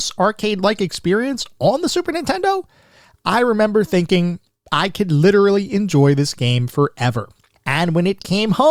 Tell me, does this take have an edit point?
yes; 1 cut; at 7.6 s

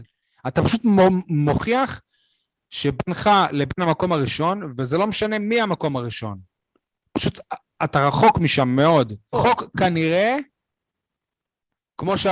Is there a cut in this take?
yes; 1 cut; at 9.3 s

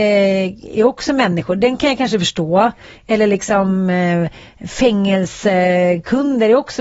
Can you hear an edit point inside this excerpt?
no; 0 cuts

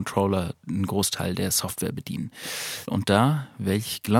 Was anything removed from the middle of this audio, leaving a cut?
yes; 1 cut; at 2.9 s

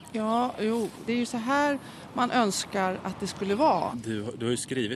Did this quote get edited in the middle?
yes; 2 cuts; at 1.0 s, 3.9 s

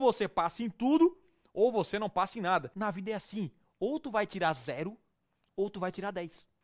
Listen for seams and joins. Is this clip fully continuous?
yes; 0 cuts

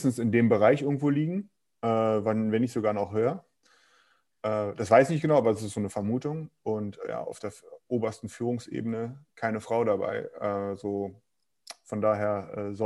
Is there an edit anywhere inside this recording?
no; 0 cuts

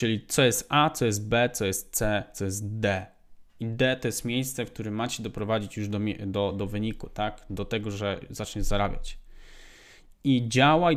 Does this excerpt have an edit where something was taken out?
no; 0 cuts

